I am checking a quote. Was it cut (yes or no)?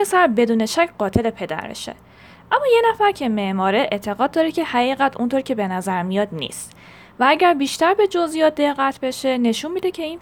no